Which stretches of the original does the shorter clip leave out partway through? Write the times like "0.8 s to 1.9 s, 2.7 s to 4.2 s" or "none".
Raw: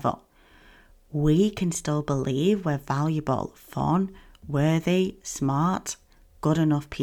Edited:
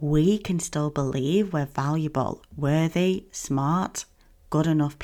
3.5 s to 4.3 s